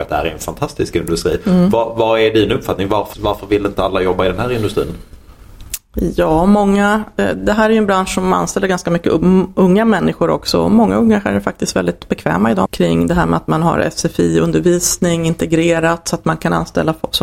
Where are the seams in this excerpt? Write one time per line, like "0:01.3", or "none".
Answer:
0:03.1
0:12.7